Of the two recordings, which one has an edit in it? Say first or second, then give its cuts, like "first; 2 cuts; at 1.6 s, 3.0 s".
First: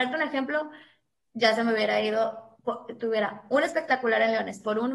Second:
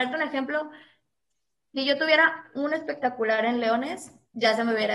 first; 1 cut; at 1.3 s